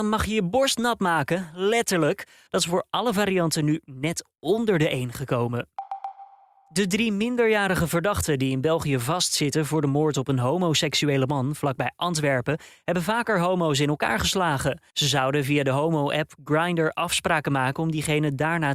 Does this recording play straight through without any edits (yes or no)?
no